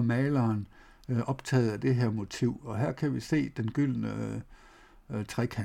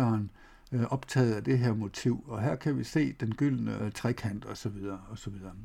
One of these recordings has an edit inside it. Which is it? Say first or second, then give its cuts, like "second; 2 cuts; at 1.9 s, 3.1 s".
second; 1 cut; at 3.8 s